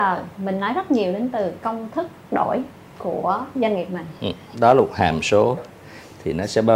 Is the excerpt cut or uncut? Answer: cut